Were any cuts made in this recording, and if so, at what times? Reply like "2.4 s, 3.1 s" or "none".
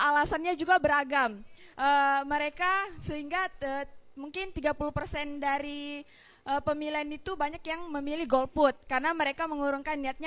none